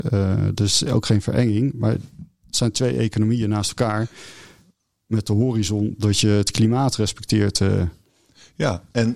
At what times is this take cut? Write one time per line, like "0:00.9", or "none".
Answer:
none